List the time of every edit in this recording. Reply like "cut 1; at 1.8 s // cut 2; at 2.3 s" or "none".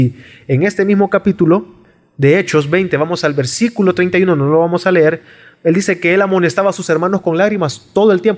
none